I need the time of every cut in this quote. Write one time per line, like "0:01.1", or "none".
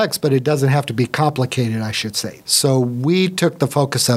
0:02.4